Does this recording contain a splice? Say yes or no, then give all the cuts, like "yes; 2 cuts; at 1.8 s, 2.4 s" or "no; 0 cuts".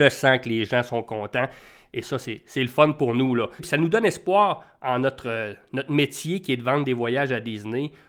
yes; 1 cut; at 3.6 s